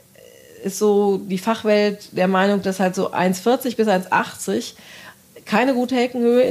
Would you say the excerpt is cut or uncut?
uncut